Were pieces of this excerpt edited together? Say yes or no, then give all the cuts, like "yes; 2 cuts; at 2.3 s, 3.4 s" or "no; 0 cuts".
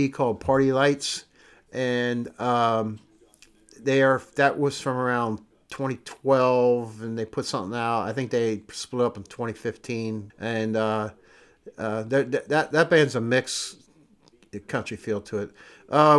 yes; 1 cut; at 10.3 s